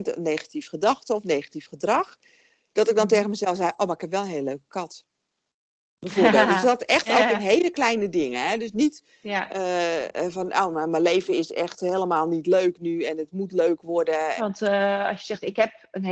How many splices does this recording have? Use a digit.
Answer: 1